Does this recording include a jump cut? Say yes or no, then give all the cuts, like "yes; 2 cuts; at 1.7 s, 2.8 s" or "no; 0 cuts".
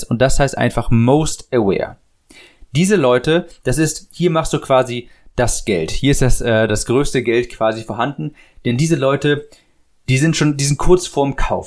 no; 0 cuts